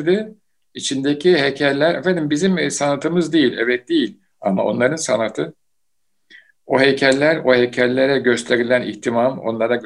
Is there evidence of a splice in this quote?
no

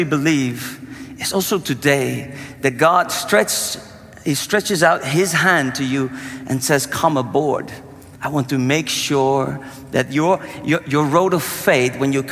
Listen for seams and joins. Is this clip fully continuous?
no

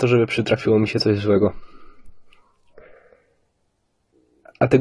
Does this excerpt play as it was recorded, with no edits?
yes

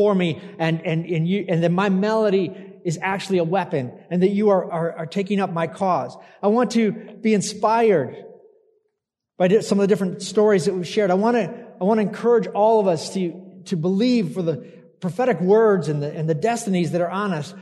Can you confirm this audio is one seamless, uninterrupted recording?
no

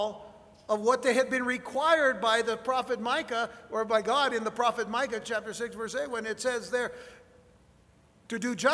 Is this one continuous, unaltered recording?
yes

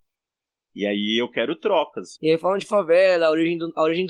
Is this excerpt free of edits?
no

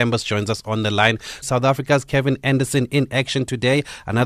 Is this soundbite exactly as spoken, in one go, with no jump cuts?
no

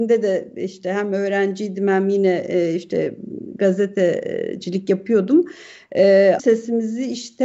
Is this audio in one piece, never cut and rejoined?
no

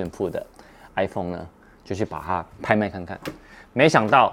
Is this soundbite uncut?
yes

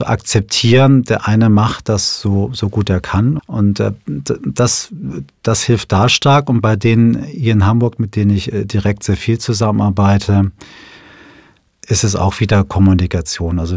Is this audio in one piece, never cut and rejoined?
no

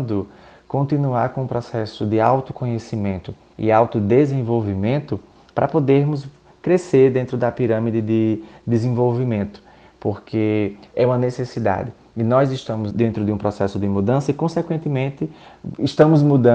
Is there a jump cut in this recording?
yes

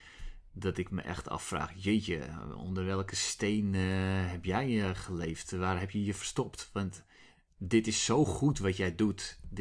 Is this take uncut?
yes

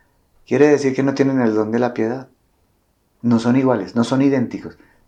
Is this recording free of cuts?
no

